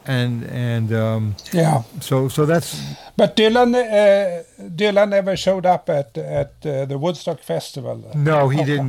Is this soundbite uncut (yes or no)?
yes